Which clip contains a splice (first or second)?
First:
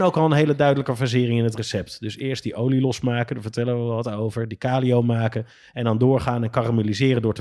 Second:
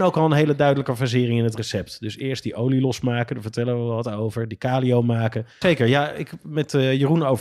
second